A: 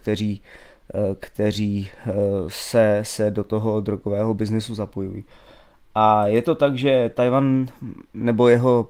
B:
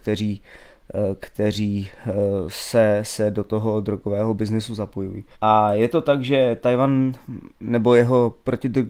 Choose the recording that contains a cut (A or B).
B